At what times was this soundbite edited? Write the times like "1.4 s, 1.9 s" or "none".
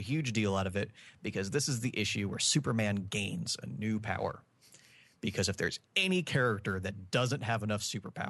none